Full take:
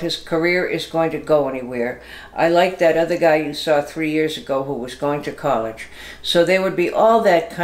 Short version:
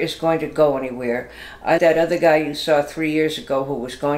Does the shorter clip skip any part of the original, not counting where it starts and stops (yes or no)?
yes